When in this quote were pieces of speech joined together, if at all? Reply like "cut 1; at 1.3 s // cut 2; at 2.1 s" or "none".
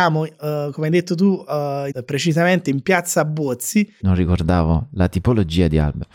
cut 1; at 1.9 s // cut 2; at 4.0 s